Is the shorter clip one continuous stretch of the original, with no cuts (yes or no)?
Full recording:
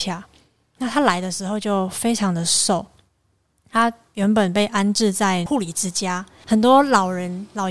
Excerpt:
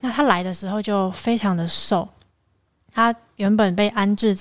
yes